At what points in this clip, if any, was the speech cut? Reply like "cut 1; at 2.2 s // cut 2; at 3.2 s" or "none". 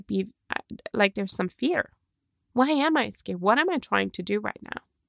none